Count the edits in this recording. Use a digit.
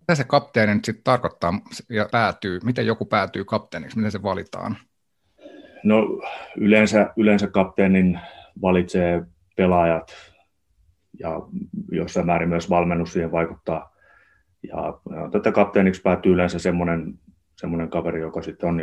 1